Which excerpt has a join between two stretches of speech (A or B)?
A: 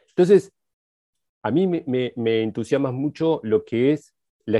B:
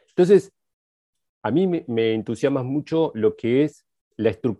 B